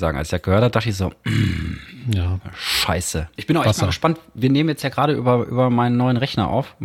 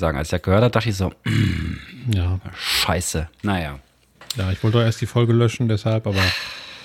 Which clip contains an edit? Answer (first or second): first